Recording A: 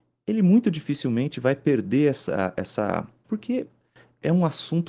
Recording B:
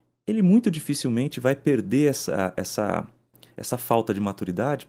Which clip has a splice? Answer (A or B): A